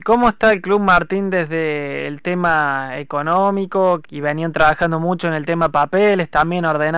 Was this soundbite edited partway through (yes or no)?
yes